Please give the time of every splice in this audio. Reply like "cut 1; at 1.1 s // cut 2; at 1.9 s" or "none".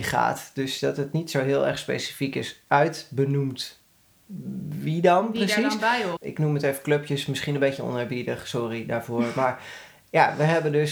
cut 1; at 6.2 s